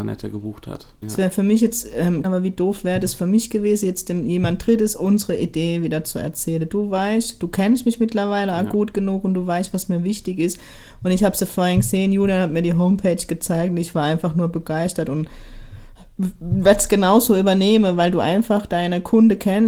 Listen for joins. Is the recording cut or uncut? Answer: cut